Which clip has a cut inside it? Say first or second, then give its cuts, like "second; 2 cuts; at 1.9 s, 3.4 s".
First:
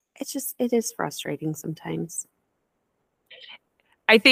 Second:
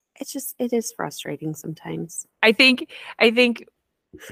second; 1 cut; at 2.3 s